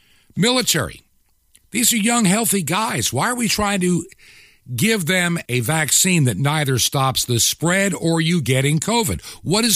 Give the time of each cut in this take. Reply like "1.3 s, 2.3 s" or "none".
5.5 s